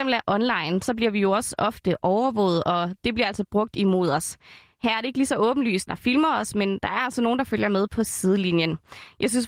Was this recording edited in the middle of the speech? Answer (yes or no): yes